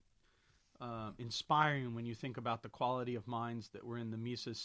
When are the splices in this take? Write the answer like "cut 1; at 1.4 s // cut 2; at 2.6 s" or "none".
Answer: none

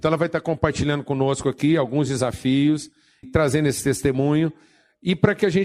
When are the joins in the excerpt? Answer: cut 1; at 3.2 s

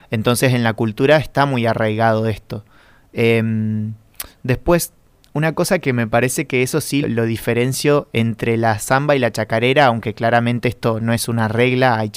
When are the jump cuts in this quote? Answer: cut 1; at 7.0 s

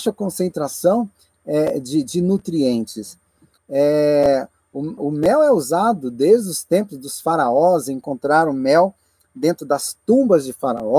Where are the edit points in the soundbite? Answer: cut 1; at 3.6 s // cut 2; at 5.0 s

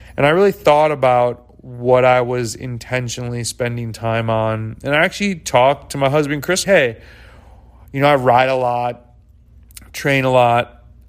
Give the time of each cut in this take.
cut 1; at 6.6 s

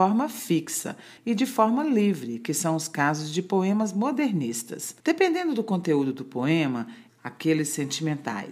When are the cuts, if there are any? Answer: cut 1; at 1.2 s // cut 2; at 5.0 s // cut 3; at 7.1 s

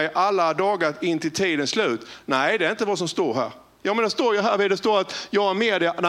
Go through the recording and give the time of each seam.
none

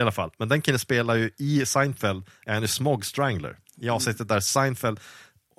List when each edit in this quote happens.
cut 1; at 3.7 s

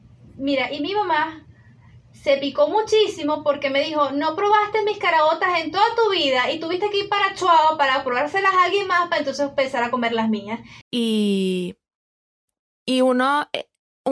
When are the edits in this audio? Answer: cut 1; at 10.8 s

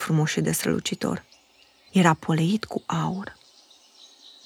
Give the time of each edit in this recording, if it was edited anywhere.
cut 1; at 1.9 s

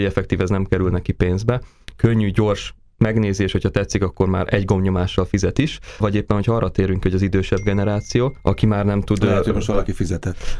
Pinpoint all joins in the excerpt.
none

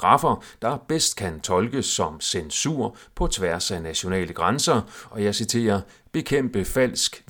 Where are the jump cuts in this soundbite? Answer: cut 1; at 5.1 s

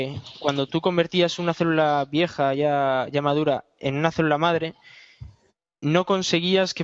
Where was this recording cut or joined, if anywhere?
none

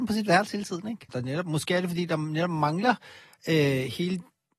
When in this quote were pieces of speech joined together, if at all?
cut 1; at 1.1 s

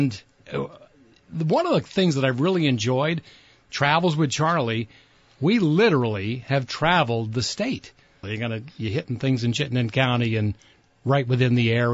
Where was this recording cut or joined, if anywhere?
cut 1; at 8.2 s

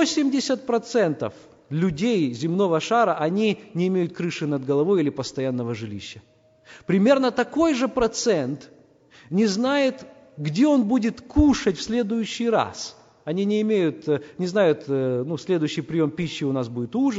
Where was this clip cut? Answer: cut 1; at 14.8 s

